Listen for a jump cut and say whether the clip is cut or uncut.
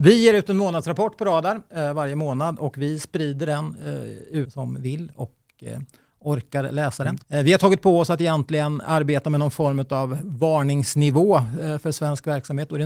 cut